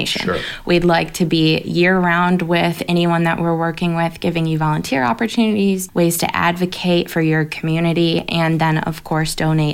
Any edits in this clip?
yes; 1 cut; at 5.9 s

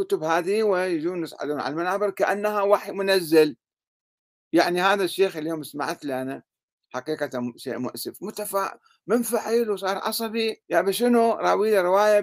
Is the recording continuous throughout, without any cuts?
no; 1 cut; at 10.6 s

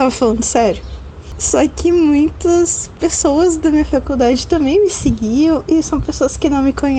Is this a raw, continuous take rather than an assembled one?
yes; 0 cuts

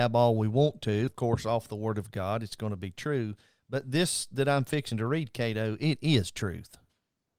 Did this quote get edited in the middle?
yes; 1 cut; at 1.1 s

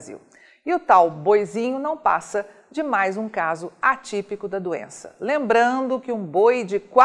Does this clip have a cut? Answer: no; 0 cuts

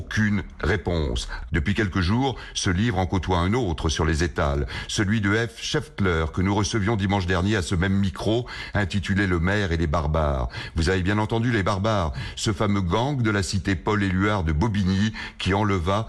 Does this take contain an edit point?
yes; 1 cut; at 1.5 s

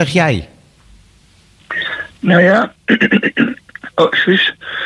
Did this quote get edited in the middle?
no; 0 cuts

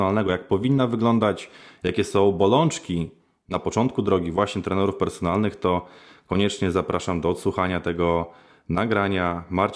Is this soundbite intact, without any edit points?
yes; 0 cuts

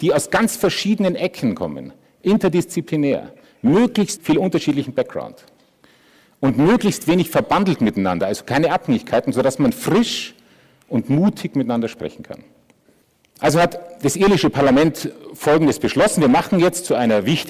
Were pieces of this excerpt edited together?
yes; 1 cut; at 4.2 s

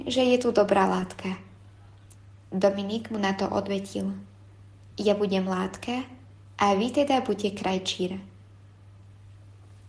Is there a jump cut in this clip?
no; 0 cuts

